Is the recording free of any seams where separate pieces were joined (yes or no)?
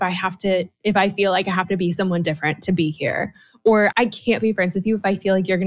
no